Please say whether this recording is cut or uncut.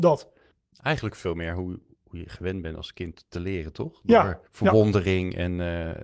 cut